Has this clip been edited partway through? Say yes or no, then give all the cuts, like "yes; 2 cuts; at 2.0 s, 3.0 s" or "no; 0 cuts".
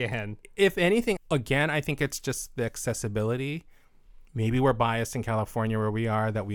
yes; 1 cut; at 1.2 s